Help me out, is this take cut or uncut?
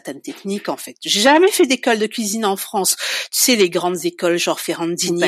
uncut